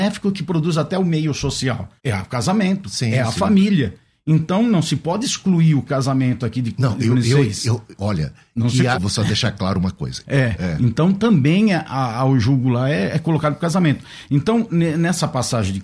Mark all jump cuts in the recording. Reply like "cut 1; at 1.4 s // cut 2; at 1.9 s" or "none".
cut 1; at 2.0 s // cut 2; at 8.9 s // cut 3; at 10.3 s